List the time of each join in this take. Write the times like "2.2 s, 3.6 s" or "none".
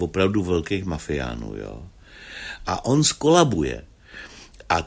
2.6 s